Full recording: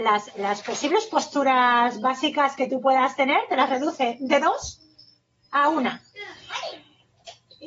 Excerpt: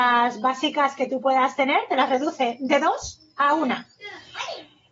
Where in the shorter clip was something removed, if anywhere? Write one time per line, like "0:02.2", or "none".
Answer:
0:03.3